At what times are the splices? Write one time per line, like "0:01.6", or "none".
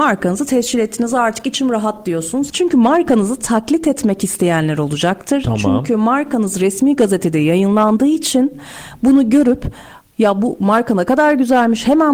0:02.5